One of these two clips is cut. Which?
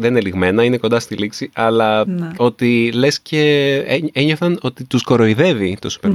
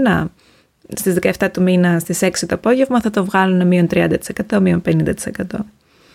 first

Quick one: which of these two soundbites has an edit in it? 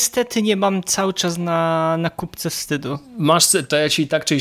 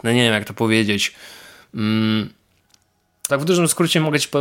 second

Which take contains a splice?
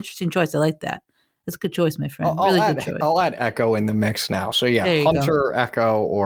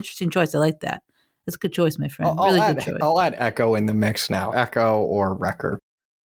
second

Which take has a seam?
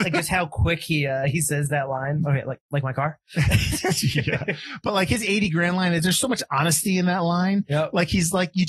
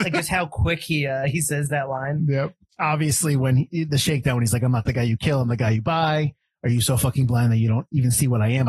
first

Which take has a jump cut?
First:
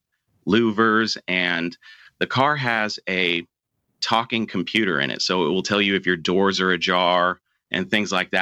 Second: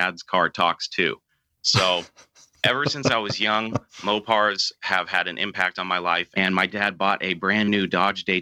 second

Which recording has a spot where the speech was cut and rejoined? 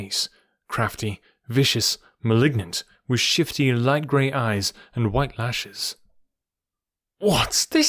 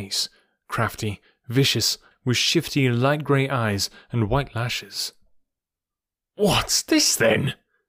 second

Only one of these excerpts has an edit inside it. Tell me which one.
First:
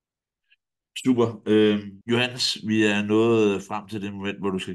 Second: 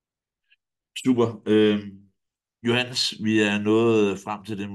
first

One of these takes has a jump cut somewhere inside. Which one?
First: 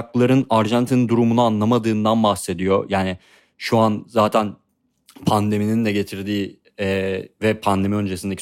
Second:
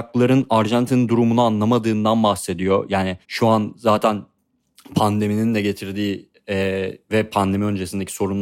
second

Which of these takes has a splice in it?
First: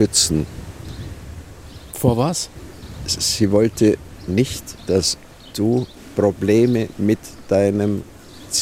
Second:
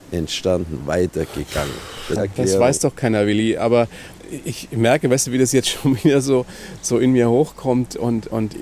second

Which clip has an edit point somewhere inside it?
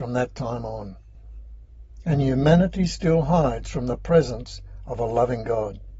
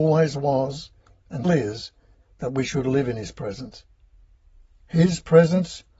second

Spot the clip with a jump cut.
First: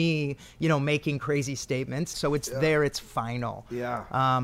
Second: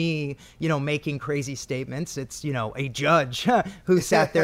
first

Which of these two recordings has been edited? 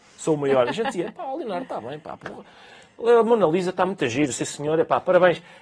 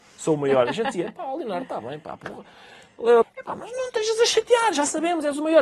second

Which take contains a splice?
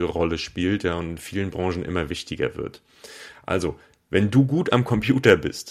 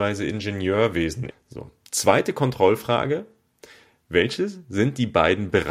second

